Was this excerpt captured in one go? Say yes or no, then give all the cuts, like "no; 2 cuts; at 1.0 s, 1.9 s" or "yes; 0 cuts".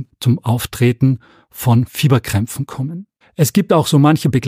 no; 1 cut; at 3.2 s